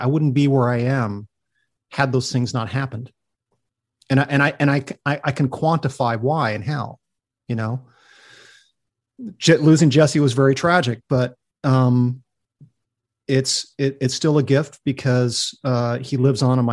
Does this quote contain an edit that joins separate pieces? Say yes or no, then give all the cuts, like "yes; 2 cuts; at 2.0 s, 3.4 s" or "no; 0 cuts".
no; 0 cuts